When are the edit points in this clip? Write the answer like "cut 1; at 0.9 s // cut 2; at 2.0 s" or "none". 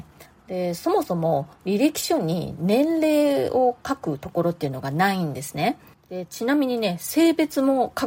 none